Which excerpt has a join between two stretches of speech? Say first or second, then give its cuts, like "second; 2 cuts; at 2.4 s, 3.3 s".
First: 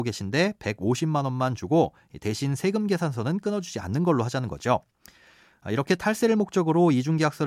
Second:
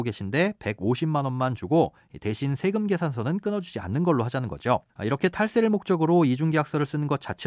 second; 1 cut; at 4.9 s